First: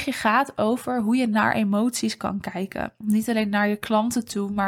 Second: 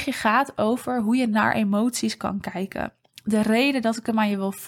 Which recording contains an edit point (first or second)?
first